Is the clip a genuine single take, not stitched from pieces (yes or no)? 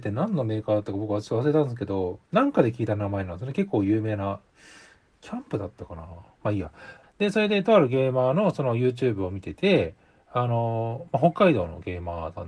no